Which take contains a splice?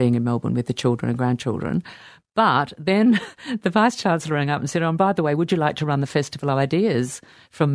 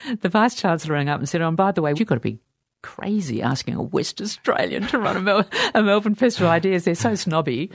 second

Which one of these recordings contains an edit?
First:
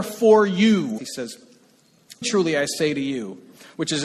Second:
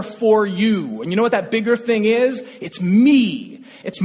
first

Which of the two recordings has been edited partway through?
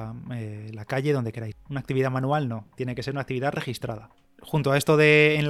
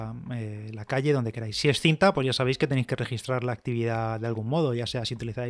first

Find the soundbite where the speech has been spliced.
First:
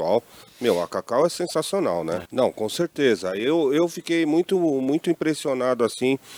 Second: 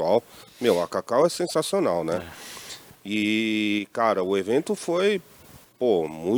first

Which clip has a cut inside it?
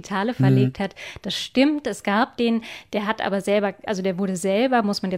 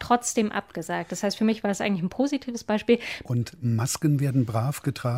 second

